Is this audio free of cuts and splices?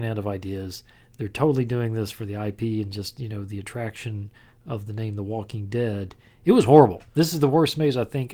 yes; 0 cuts

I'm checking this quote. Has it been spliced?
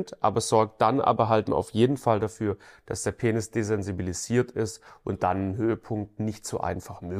yes; 1 cut; at 1.5 s

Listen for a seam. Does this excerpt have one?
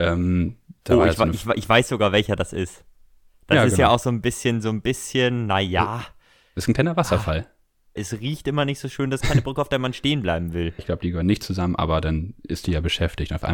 yes; 2 cuts; at 8.0 s, 10.8 s

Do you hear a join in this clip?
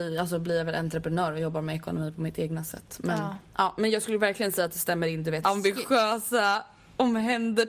yes; 1 cut; at 5.4 s

